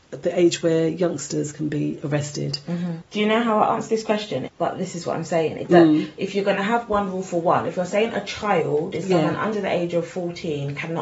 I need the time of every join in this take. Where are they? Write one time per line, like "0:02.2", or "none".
0:03.0
0:04.5